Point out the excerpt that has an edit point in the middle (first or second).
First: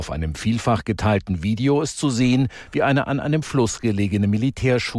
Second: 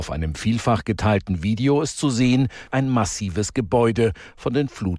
second